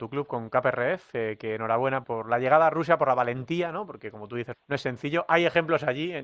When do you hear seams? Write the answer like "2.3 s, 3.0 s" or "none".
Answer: 2.0 s, 4.5 s

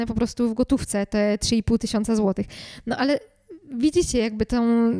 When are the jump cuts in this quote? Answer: none

